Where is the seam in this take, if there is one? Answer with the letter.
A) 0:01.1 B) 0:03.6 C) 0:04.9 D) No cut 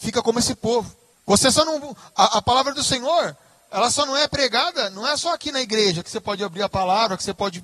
A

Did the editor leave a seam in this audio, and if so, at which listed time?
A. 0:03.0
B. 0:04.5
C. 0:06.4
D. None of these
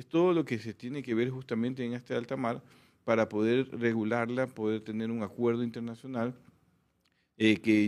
D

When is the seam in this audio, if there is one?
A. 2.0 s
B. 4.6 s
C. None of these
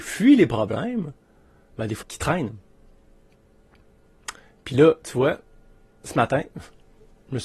A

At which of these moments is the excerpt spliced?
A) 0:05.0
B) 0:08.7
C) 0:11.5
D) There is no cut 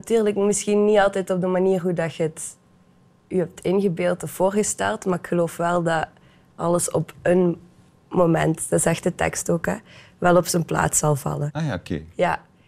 C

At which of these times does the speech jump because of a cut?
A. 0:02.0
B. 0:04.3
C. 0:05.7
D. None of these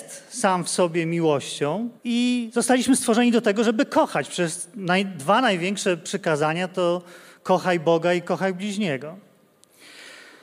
A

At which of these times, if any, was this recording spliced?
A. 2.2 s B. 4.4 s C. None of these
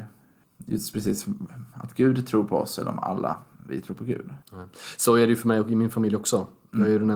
B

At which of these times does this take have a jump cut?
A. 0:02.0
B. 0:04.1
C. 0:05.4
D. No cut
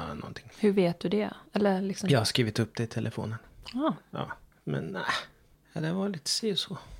D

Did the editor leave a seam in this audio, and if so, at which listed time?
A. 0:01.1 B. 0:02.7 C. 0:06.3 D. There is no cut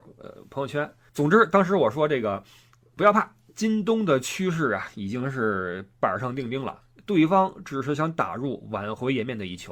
A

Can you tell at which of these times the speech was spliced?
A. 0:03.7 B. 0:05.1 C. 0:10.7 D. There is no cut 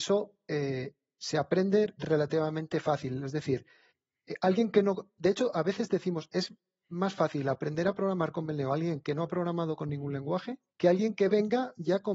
C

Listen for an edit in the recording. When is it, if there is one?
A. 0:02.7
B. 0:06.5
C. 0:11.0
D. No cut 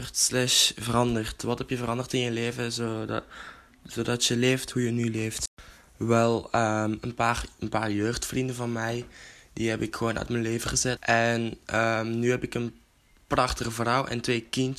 C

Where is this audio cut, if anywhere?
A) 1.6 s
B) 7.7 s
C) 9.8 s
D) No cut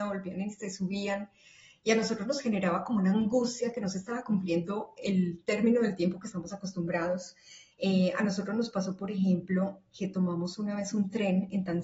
B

